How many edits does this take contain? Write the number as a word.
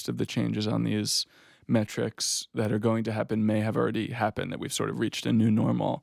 zero